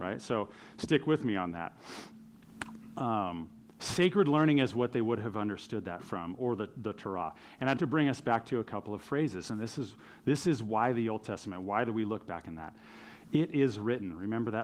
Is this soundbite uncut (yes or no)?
no